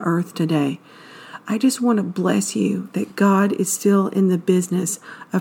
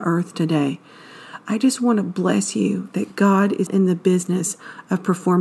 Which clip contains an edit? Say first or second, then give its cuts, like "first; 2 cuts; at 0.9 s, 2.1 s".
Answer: second; 1 cut; at 3.7 s